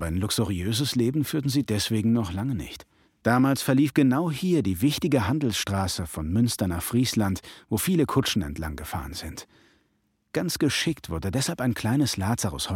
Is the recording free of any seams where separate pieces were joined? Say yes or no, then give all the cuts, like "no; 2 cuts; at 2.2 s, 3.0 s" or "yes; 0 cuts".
no; 1 cut; at 3.0 s